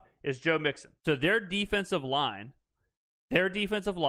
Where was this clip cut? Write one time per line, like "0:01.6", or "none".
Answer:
0:01.0